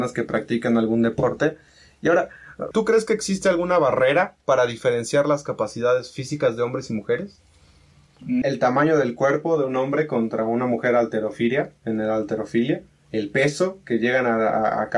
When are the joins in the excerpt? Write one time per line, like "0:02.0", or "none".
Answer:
0:02.7
0:08.4